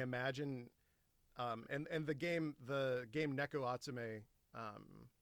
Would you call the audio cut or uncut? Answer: uncut